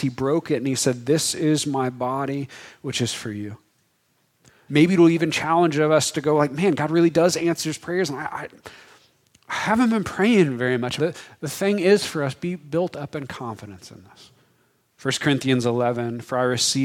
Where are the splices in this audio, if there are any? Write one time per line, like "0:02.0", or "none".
0:04.7
0:11.0
0:14.9